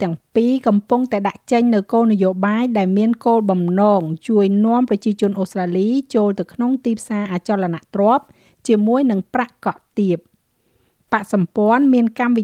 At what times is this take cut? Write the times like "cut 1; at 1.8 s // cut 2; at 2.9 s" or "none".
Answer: none